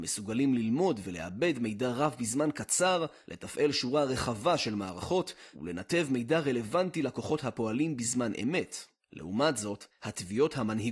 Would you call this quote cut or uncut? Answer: uncut